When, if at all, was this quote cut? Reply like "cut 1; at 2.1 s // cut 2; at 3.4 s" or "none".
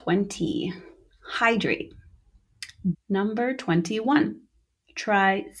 cut 1; at 2.9 s

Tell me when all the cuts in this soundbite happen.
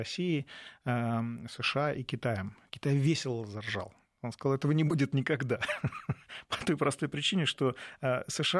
none

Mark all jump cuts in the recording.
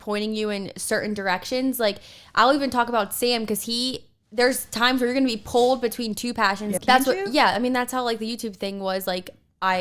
cut 1; at 6.8 s

